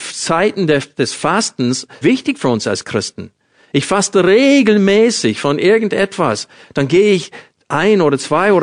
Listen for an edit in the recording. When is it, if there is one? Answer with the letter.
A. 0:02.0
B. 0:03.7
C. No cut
A